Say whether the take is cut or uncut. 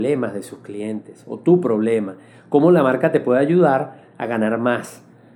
uncut